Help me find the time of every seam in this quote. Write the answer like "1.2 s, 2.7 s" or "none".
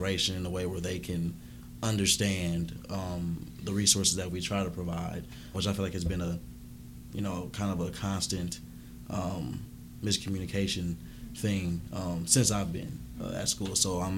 5.5 s